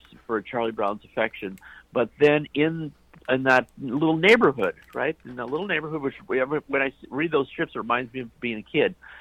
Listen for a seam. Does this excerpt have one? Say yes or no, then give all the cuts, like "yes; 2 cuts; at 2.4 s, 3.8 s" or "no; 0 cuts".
no; 0 cuts